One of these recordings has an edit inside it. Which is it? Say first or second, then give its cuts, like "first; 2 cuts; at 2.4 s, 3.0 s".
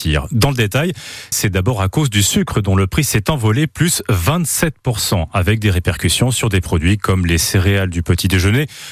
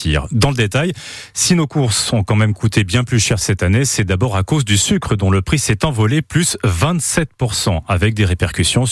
first; 1 cut; at 1.3 s